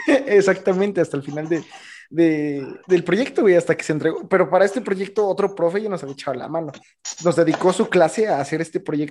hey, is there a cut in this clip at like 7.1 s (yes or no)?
no